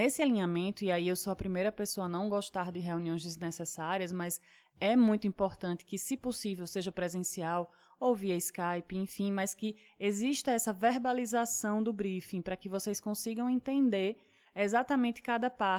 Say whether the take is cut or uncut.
uncut